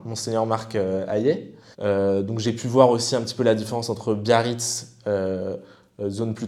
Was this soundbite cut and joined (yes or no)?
yes